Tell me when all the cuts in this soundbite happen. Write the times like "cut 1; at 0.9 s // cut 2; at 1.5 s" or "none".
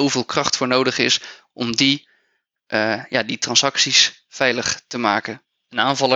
none